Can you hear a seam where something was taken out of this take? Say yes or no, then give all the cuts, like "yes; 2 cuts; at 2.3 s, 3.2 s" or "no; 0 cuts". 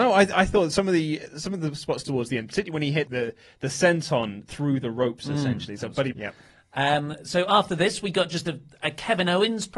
yes; 2 cuts; at 3.1 s, 6.1 s